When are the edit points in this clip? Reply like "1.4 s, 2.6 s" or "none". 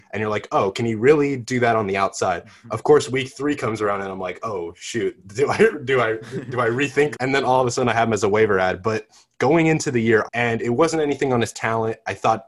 7.1 s, 10.2 s